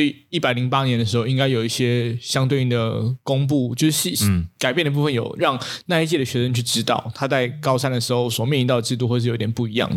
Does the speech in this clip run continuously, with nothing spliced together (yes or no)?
yes